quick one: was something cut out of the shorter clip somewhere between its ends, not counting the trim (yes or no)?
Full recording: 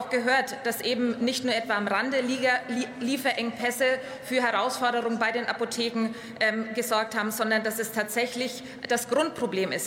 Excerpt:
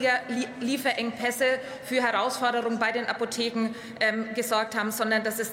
no